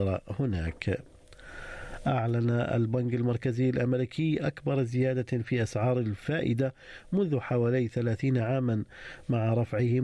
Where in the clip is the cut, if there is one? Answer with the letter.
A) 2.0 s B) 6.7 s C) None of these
C